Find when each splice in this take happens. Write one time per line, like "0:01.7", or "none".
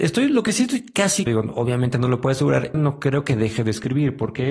0:01.3
0:02.7